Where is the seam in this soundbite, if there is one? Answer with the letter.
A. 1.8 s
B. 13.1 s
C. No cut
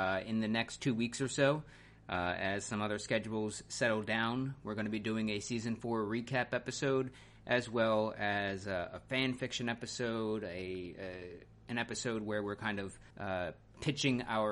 B